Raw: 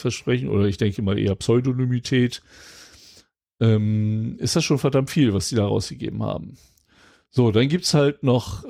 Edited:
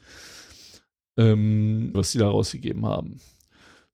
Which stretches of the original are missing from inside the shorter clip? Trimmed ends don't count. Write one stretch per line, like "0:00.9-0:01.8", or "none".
0:04.4-0:05.3